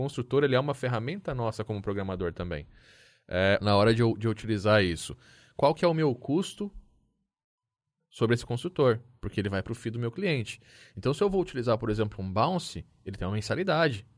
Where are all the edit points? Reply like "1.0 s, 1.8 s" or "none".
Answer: 3.6 s